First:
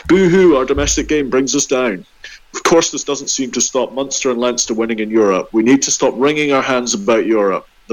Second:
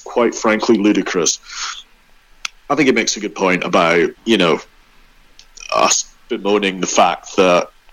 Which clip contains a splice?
second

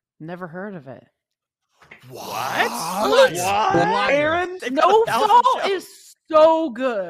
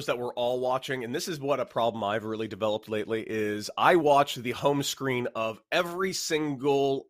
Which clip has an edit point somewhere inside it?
first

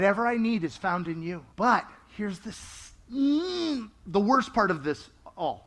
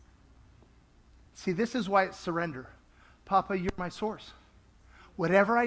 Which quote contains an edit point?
first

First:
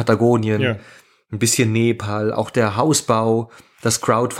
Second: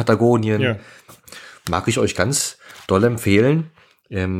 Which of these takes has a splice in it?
second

